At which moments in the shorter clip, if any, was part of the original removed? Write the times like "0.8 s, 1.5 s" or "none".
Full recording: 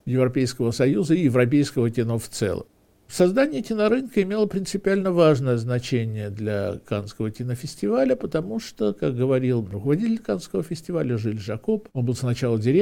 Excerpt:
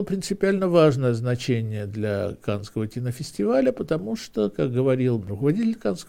none